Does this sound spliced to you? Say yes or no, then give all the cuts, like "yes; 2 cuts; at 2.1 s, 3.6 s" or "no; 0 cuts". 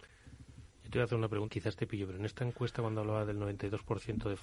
yes; 1 cut; at 1.5 s